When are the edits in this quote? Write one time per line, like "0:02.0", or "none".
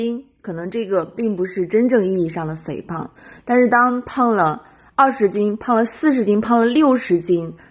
none